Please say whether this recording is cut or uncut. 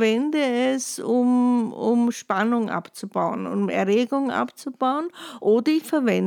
uncut